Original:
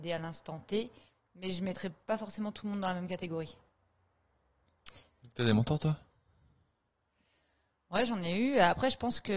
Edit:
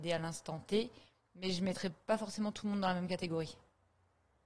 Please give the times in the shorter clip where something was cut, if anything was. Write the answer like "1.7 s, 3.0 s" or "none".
none